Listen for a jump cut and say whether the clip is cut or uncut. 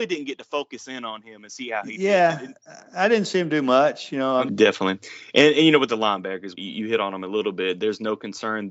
cut